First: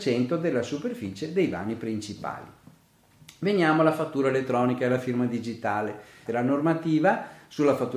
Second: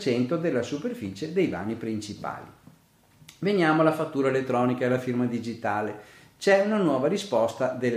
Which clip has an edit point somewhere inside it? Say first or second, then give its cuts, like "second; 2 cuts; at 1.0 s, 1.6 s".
first; 1 cut; at 6.3 s